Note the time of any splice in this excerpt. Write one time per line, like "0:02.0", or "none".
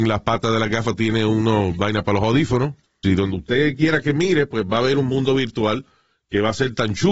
0:03.0